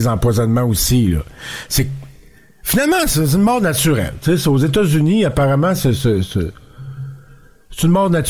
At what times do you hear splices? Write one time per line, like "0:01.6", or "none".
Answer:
none

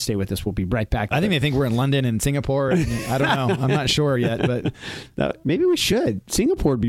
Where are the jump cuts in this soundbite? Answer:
0:01.1

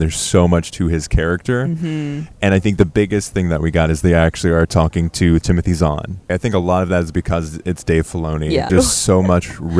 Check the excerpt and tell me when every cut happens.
0:06.3
0:08.7

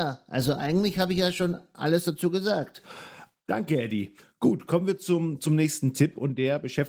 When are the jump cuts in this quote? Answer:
0:03.4

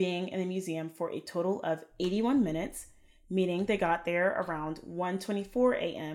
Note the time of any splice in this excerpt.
none

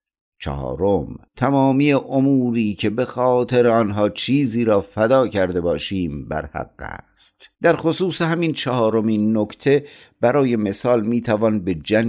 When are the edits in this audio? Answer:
0:01.3
0:07.5

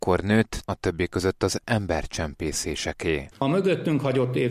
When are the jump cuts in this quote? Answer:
0:03.3

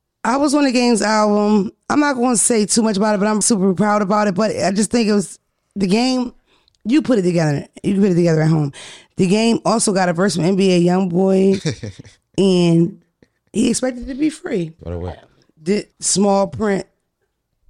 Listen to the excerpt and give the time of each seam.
0:03.4
0:14.8
0:15.9

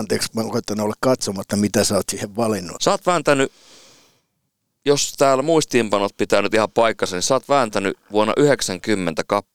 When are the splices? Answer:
0:02.8

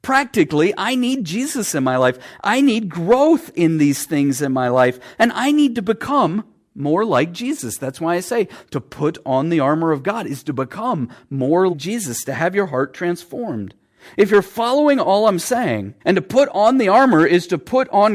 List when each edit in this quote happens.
0:11.7
0:16.0

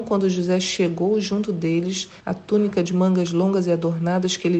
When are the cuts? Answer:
0:02.2

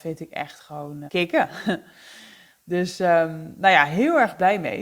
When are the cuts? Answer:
0:01.1

